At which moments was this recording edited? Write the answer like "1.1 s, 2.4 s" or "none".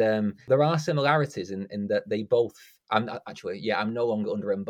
none